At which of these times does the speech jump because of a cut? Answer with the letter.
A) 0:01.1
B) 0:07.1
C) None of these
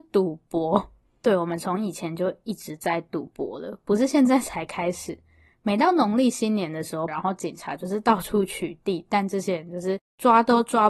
B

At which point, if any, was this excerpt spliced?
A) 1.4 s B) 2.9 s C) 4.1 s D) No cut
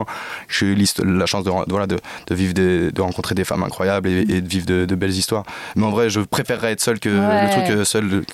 D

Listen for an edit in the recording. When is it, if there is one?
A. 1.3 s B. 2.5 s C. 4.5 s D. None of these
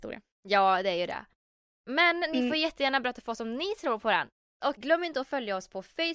D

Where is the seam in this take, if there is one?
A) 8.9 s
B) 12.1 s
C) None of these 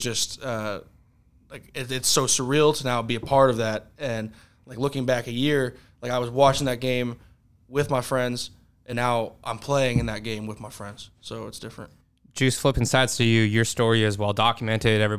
C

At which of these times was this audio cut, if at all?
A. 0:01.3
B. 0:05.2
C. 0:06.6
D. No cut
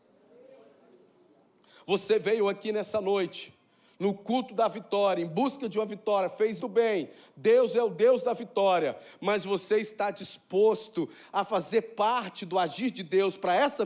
C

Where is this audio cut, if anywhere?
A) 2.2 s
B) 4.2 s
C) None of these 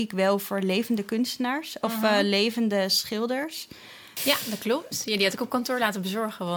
B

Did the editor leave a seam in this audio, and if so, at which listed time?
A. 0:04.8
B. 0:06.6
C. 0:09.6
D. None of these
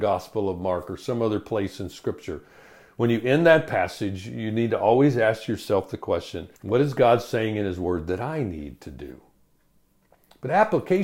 B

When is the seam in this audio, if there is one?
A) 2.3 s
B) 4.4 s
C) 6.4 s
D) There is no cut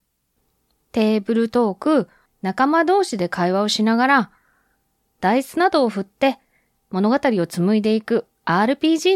A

